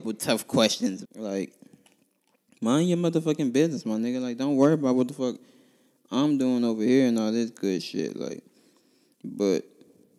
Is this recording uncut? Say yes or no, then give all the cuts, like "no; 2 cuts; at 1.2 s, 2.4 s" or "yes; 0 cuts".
no; 1 cut; at 1.1 s